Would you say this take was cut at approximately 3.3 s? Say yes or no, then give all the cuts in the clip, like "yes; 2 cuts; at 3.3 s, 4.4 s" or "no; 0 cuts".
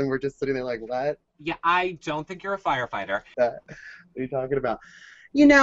yes; 2 cuts; at 1.2 s, 3.3 s